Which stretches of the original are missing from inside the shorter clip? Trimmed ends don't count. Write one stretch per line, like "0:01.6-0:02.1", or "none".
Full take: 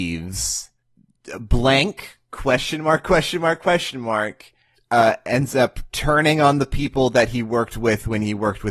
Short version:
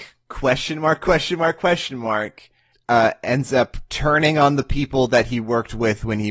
none